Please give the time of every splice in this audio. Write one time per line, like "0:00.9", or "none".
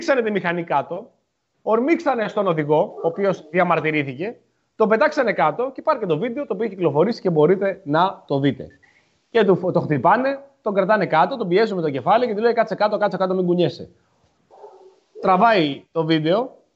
none